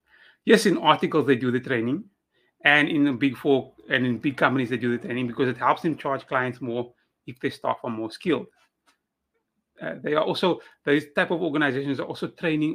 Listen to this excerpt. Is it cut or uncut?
uncut